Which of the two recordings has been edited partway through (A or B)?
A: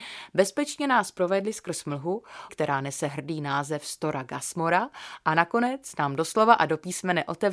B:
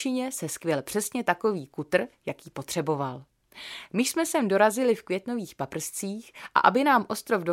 A